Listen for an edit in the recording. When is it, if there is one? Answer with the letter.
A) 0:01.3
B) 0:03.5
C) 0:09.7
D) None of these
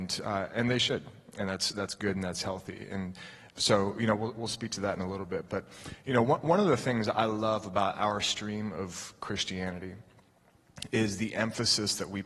B